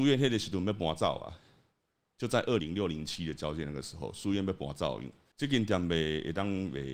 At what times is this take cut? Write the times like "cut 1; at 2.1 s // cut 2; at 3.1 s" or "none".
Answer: cut 1; at 2.6 s // cut 2; at 5.3 s